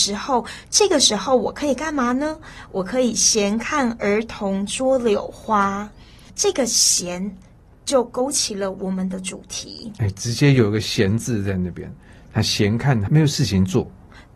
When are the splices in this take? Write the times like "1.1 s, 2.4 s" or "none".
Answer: 13.1 s